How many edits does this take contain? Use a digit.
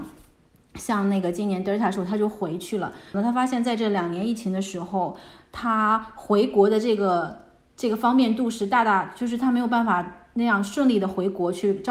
1